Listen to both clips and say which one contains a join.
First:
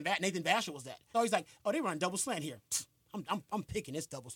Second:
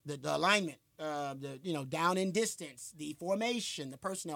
first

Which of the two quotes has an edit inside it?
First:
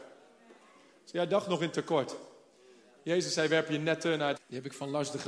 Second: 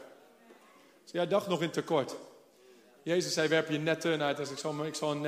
first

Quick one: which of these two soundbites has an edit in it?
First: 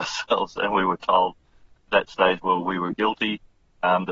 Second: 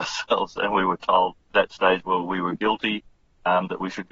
second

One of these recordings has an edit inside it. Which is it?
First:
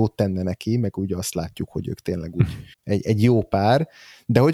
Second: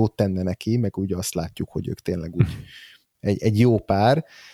first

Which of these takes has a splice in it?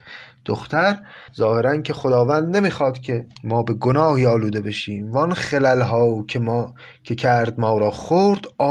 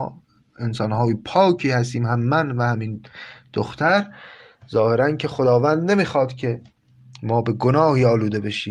first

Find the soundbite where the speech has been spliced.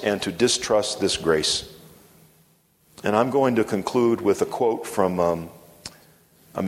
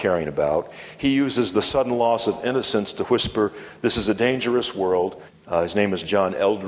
second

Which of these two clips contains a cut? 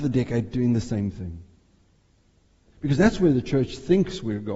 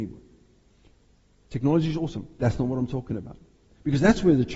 first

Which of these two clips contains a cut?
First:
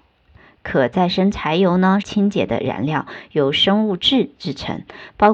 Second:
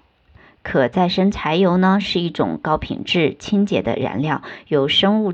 first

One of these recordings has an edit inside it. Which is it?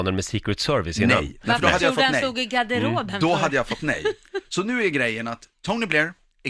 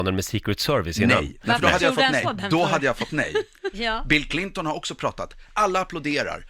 second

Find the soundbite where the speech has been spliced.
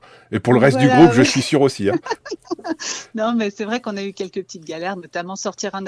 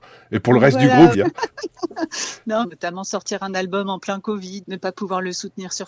second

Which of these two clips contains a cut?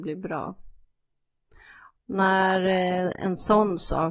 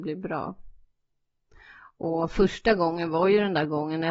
first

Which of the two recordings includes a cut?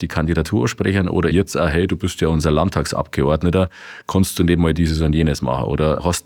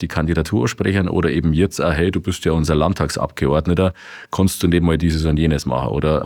first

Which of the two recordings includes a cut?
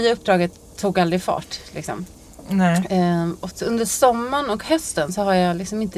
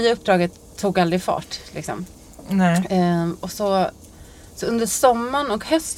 first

